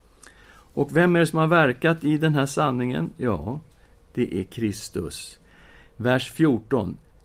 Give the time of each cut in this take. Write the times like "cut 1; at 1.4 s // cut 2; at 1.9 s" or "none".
none